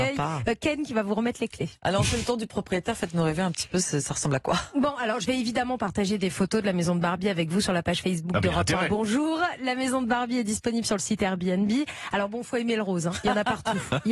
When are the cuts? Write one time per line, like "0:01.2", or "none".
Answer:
none